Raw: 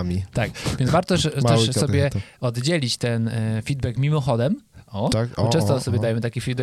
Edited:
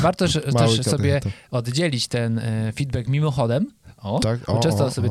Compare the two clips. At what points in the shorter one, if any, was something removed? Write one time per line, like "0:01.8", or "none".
none